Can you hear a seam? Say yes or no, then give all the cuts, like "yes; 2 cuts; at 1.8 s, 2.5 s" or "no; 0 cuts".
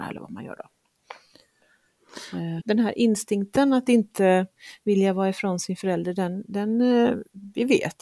yes; 1 cut; at 2.6 s